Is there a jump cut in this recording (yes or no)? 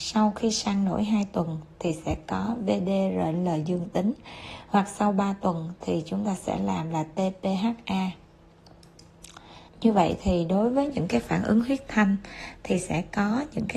yes